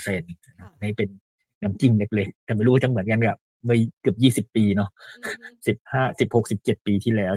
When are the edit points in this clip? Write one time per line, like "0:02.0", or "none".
none